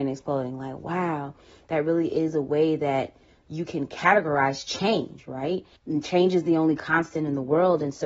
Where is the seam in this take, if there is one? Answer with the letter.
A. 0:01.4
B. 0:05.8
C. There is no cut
B